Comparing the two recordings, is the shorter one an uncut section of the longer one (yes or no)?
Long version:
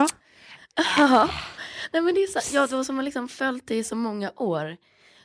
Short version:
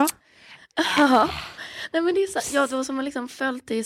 yes